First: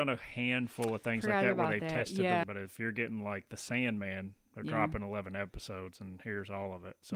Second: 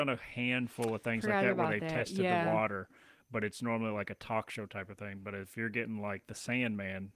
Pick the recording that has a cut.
first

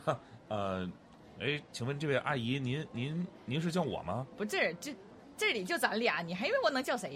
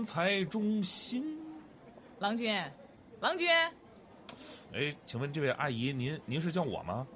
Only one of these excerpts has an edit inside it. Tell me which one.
second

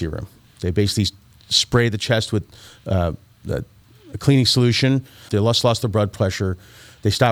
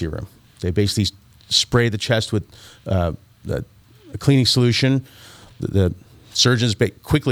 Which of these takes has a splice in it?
first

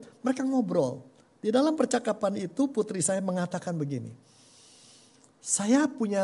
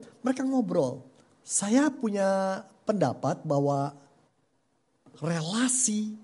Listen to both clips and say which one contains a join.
second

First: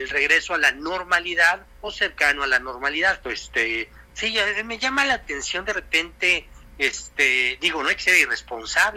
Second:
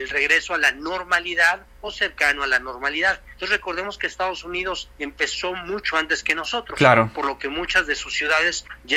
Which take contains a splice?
first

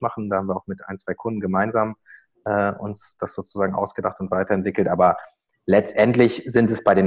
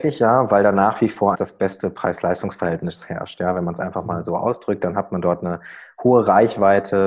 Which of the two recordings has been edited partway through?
second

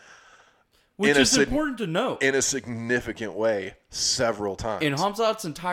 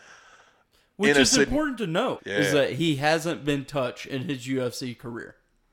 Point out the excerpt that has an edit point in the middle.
second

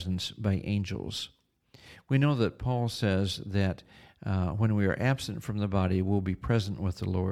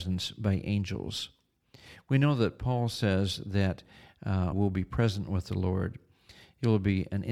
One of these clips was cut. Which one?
second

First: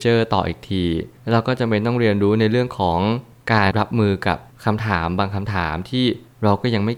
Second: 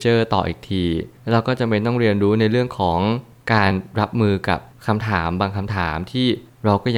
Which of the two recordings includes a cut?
first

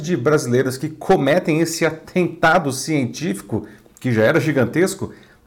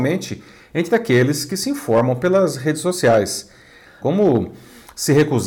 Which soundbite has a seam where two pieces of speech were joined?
second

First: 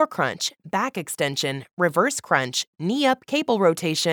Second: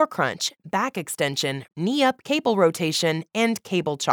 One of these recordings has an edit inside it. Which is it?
second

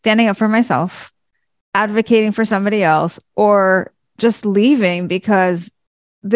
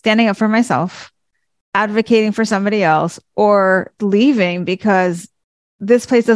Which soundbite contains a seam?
second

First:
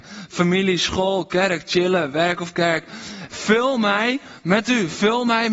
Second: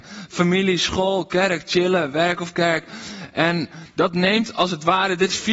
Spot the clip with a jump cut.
first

